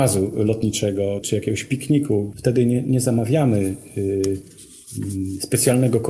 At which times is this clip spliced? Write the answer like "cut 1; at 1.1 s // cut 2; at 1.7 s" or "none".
cut 1; at 1.2 s // cut 2; at 2.3 s